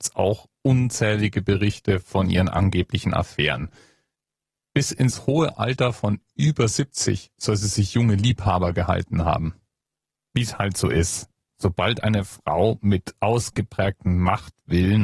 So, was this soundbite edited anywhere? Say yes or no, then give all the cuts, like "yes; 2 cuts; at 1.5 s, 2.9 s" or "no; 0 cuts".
no; 0 cuts